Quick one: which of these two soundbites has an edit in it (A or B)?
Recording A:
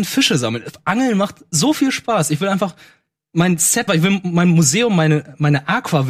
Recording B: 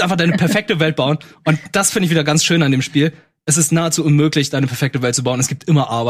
A